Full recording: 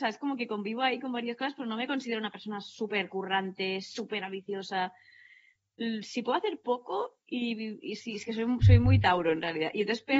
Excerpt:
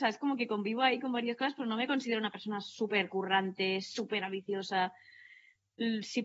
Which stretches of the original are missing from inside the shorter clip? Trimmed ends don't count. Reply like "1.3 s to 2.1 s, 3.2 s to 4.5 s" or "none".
none